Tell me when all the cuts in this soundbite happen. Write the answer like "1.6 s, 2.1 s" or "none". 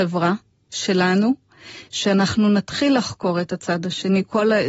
1.9 s